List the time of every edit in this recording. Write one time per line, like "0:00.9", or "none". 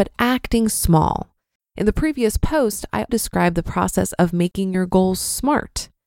0:01.6
0:03.1